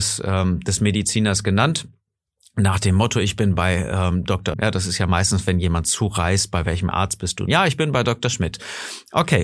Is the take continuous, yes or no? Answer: no